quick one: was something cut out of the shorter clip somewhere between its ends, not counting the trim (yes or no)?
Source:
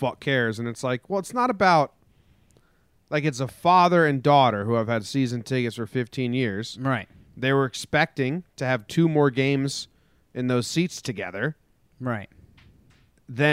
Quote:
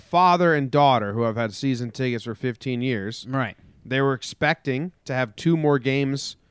no